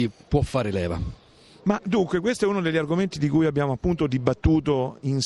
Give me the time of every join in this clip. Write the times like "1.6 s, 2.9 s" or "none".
none

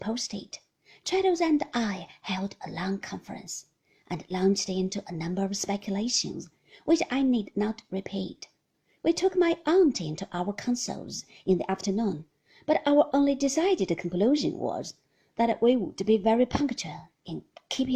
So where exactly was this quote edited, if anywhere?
none

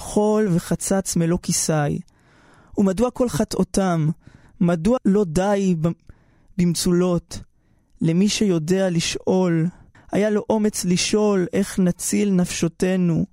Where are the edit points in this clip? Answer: 5.0 s, 9.9 s

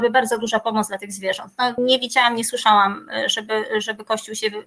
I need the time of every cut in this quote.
1.8 s

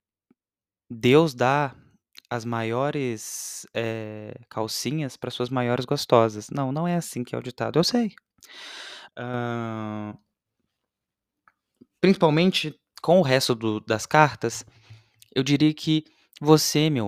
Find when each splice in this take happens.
9.1 s

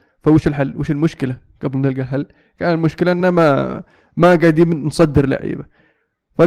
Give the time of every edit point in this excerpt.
none

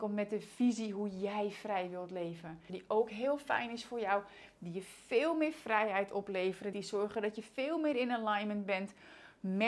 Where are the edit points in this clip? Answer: 2.7 s, 6.7 s

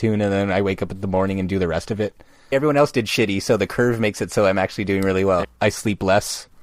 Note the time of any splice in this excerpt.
2.5 s, 5.4 s

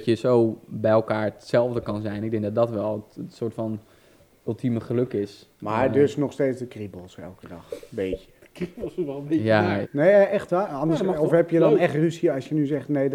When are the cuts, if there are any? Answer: 9.8 s

